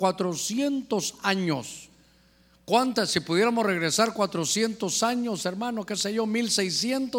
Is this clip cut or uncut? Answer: uncut